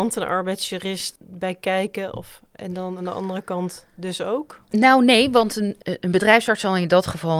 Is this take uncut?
yes; 0 cuts

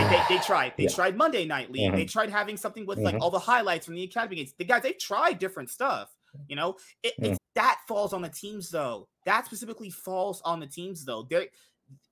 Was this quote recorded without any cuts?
no; 1 cut; at 7.4 s

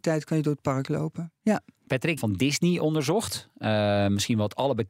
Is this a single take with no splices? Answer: no; 1 cut; at 2.2 s

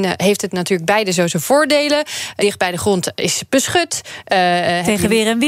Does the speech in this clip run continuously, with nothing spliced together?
no; 1 cut; at 2.4 s

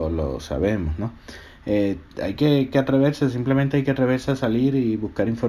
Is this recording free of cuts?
yes; 0 cuts

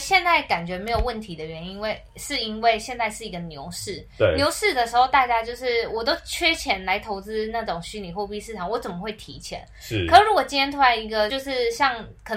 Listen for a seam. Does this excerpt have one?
yes; 1 cut; at 11.3 s

